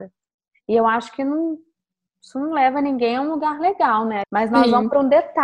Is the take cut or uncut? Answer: cut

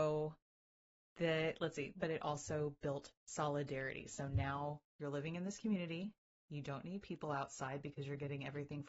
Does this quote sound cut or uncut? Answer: cut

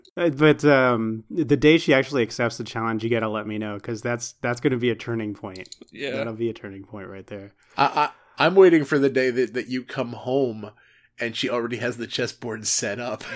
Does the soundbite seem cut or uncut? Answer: uncut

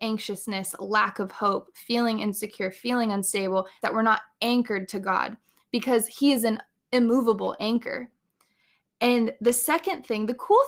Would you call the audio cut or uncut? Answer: cut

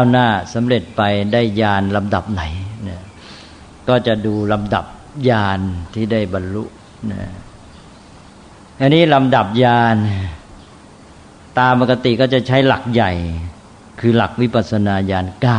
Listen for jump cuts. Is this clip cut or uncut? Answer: uncut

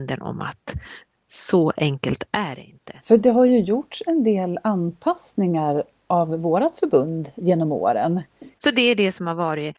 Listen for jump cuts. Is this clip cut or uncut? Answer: cut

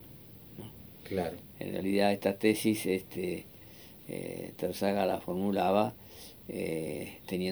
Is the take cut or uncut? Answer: uncut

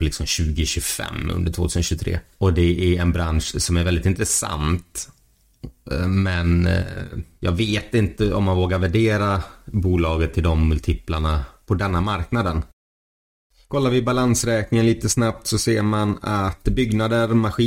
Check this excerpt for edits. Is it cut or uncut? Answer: uncut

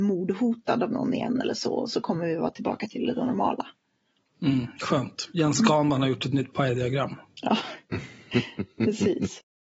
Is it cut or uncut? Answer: uncut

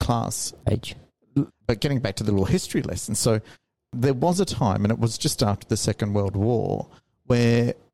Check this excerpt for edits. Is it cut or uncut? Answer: cut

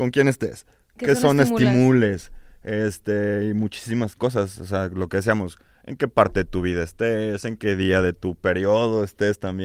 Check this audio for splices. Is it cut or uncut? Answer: uncut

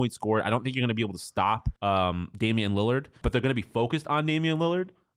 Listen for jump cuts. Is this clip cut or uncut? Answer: cut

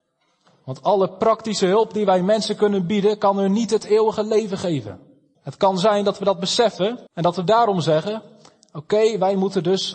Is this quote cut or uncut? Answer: cut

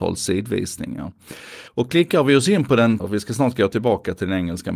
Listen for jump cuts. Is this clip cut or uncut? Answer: cut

